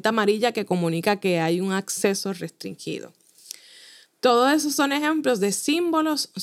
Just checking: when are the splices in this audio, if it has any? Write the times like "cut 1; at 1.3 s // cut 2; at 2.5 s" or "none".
none